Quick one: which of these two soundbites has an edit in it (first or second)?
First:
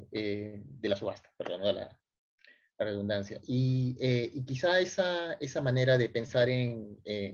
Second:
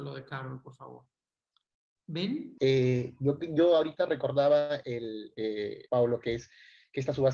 second